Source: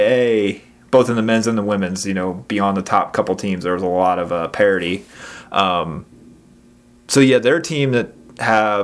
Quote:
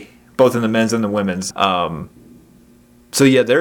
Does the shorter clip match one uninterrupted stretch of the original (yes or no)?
no